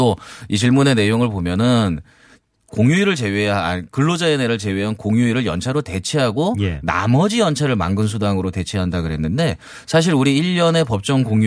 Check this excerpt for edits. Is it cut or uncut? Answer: uncut